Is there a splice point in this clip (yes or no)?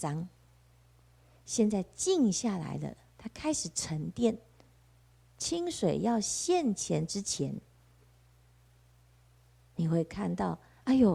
no